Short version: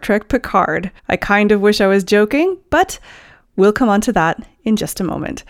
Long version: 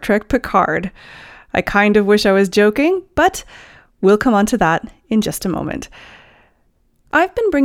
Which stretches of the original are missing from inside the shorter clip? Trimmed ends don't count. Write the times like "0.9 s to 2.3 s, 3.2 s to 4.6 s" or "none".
1.0 s to 1.4 s